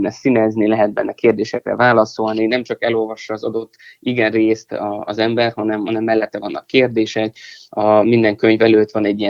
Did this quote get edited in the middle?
no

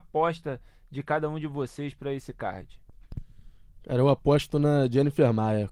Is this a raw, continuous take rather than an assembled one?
yes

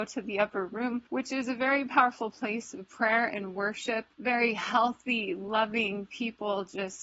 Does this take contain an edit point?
no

